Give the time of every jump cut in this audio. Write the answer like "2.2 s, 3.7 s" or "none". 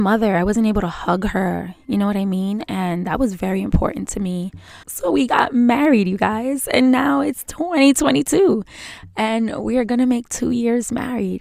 4.8 s

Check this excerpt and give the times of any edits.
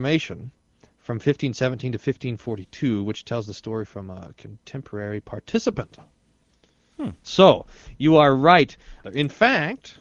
7.2 s, 9.0 s

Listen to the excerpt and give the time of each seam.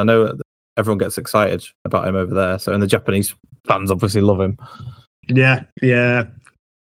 1.7 s

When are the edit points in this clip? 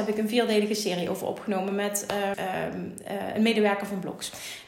2.3 s

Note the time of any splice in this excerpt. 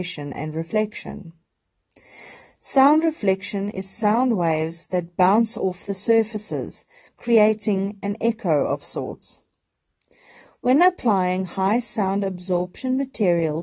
none

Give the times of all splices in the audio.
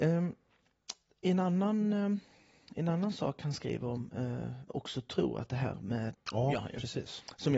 4.7 s, 6.1 s

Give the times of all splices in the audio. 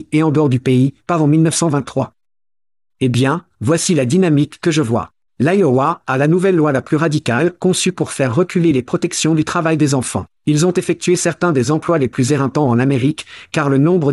1.0 s, 5.2 s, 10.3 s

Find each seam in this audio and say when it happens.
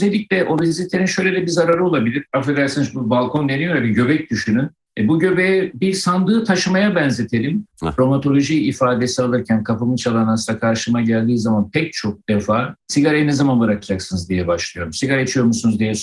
7.7 s

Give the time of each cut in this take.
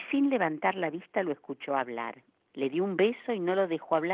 2.5 s

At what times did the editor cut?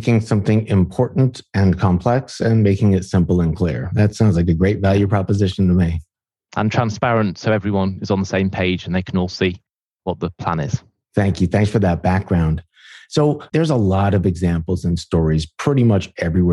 13.5 s

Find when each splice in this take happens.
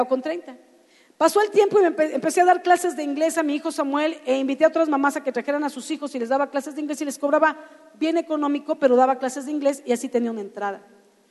none

